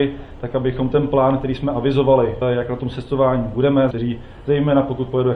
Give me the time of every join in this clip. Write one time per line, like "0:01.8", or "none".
0:02.4
0:03.9